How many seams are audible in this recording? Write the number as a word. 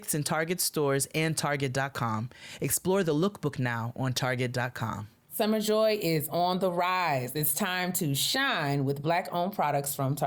zero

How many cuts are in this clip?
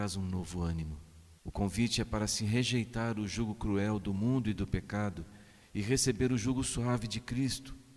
one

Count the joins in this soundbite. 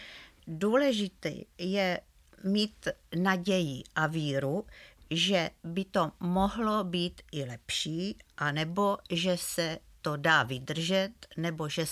zero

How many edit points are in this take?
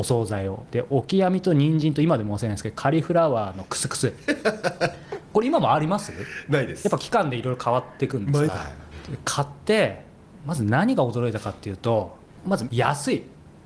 one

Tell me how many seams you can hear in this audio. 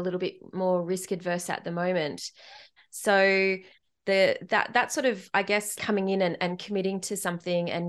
two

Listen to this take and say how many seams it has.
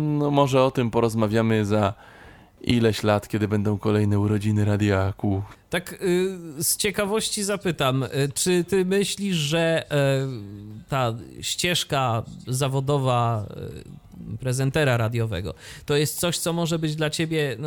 one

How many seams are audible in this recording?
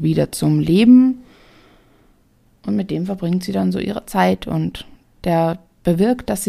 zero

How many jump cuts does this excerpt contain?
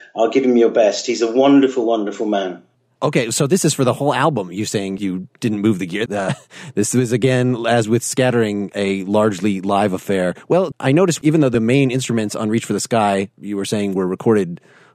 one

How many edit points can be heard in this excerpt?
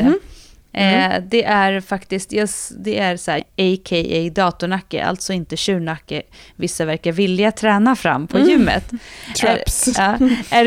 one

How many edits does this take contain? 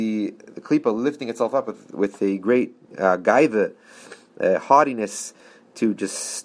zero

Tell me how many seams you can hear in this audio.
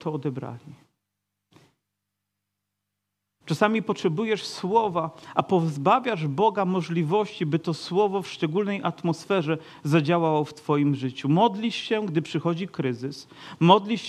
zero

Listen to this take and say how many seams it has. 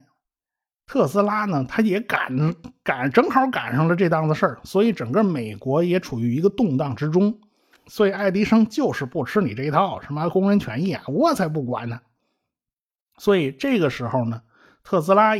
one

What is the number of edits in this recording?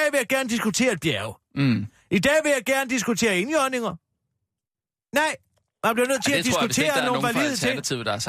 zero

